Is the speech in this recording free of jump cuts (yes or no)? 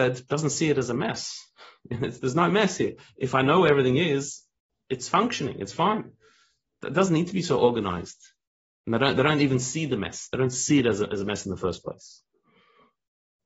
yes